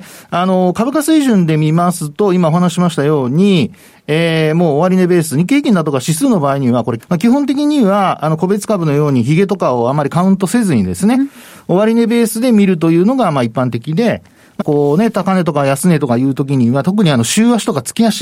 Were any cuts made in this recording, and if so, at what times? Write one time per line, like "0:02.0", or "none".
0:07.0
0:14.6